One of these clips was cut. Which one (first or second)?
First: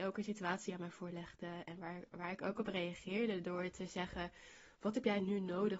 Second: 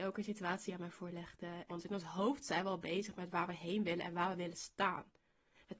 second